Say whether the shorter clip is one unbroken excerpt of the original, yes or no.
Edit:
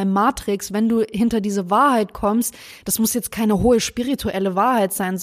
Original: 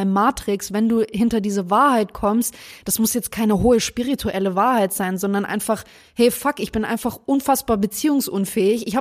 yes